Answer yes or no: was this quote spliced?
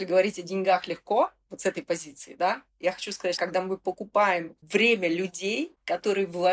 yes